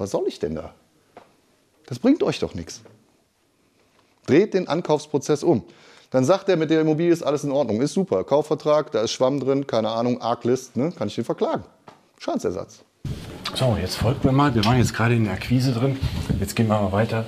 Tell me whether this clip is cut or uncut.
uncut